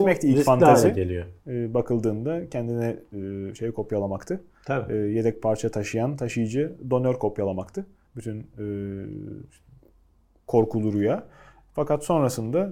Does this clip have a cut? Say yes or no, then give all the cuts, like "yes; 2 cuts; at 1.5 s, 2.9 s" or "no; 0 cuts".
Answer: no; 0 cuts